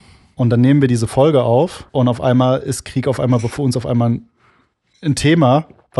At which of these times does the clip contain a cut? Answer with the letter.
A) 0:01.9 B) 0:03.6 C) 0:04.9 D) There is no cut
A